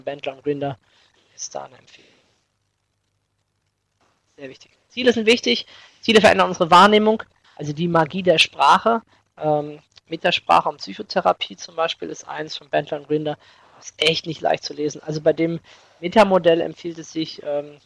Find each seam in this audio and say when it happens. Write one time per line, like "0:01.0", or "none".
0:07.4